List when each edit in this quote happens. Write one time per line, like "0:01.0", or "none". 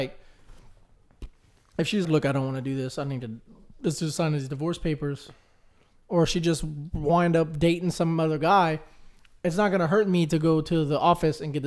0:02.0